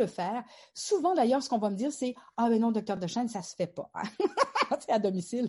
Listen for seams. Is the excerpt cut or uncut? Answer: uncut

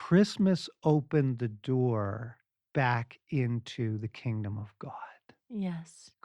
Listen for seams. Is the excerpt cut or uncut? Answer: uncut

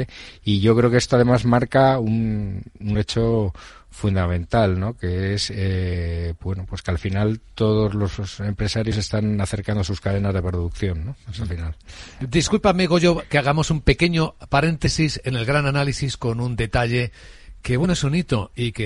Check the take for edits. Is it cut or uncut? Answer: uncut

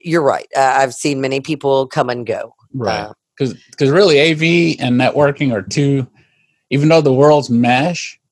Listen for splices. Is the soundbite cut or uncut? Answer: cut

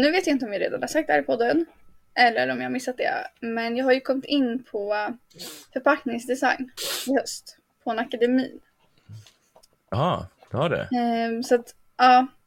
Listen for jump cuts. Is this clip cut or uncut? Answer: uncut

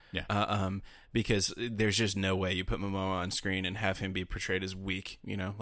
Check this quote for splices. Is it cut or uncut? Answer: uncut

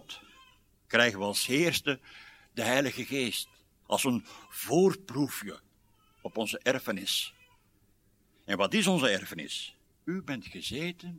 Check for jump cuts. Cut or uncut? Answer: cut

